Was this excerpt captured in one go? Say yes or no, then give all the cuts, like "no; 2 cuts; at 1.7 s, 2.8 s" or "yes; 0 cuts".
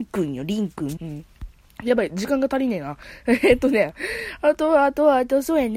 no; 1 cut; at 1.0 s